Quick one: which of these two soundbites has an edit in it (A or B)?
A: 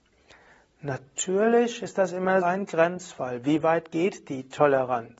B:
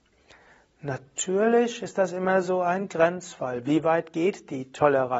A